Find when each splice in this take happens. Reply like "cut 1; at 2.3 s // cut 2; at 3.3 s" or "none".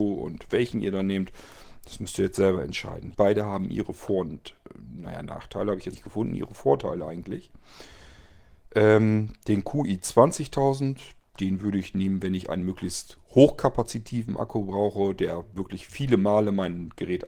cut 1; at 3.1 s // cut 2; at 5.9 s